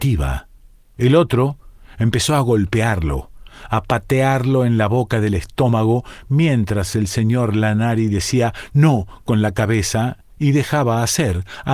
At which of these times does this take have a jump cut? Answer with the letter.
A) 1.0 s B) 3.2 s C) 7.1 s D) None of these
A